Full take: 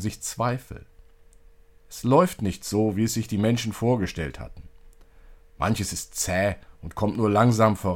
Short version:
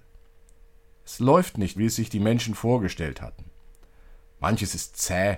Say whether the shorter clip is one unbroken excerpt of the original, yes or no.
no